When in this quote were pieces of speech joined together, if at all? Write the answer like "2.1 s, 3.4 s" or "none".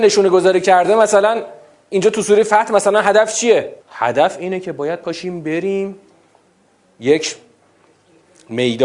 3.8 s